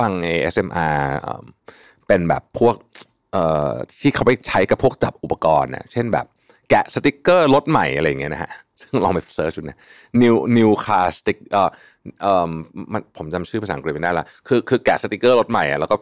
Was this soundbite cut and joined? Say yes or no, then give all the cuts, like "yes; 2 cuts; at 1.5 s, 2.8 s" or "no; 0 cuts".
no; 0 cuts